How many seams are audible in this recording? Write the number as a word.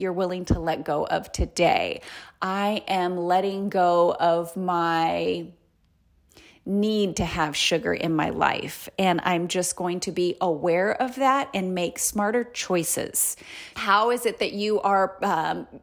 one